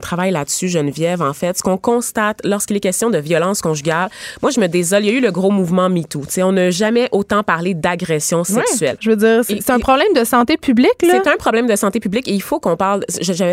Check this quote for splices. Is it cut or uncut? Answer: cut